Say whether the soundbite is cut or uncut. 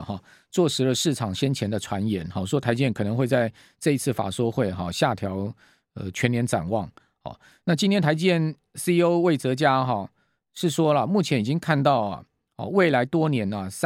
uncut